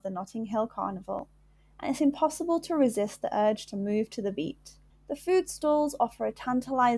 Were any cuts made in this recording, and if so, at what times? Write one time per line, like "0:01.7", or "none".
0:04.9